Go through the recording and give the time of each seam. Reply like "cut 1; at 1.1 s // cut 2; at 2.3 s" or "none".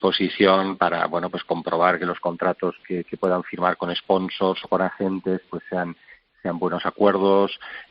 none